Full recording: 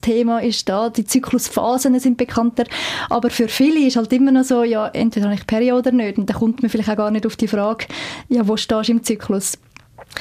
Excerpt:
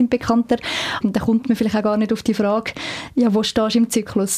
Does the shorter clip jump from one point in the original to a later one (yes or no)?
yes